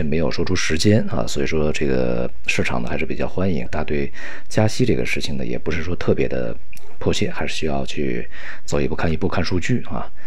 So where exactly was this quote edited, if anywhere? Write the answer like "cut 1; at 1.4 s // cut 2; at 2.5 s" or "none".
cut 1; at 3.7 s